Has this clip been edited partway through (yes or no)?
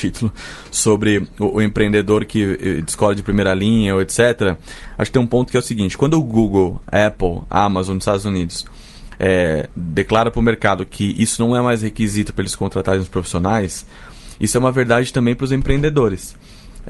no